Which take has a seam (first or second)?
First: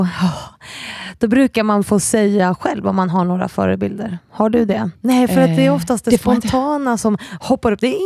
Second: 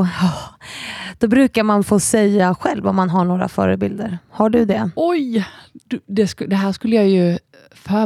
first